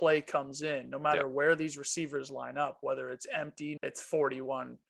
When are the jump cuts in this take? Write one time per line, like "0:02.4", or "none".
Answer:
0:03.8